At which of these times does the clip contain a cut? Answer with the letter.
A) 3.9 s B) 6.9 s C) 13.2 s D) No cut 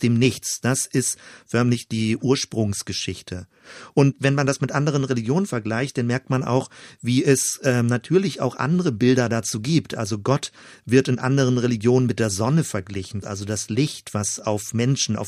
C